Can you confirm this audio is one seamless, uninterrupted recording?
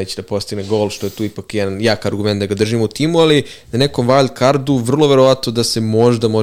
yes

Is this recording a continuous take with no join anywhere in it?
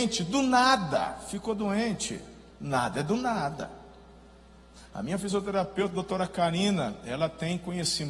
yes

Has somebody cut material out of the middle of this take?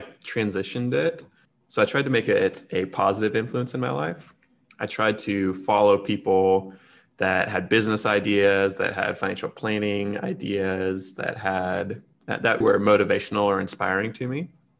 yes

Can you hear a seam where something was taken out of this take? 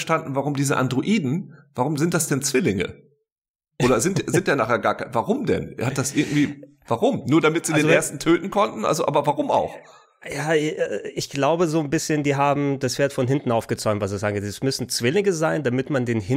no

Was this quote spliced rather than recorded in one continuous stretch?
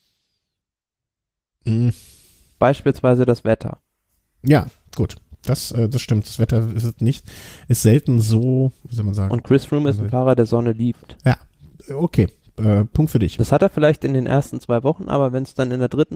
yes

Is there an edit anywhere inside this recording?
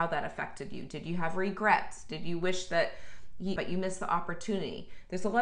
yes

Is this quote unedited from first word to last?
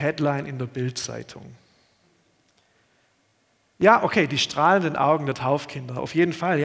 yes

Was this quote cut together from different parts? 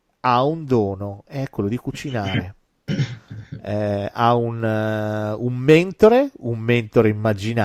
yes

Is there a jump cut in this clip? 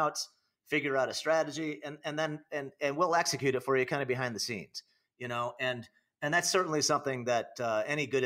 no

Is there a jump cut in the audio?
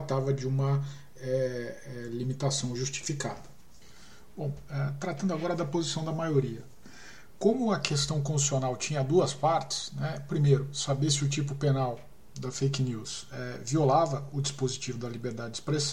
no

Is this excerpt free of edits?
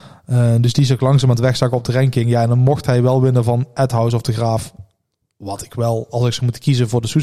yes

